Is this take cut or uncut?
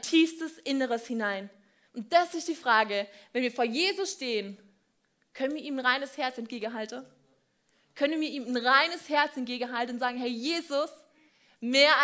cut